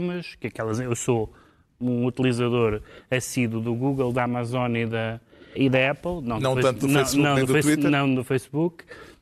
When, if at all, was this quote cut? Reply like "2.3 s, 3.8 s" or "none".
5.6 s